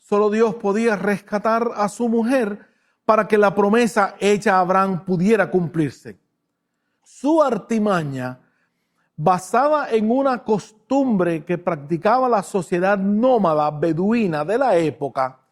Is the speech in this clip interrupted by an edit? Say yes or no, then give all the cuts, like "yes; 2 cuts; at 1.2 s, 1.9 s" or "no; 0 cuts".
yes; 1 cut; at 7.0 s